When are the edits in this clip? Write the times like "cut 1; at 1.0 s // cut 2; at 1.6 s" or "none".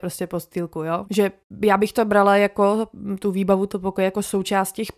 cut 1; at 1.0 s